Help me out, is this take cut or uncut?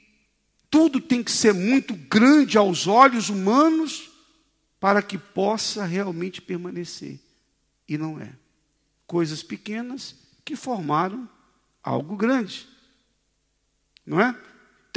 cut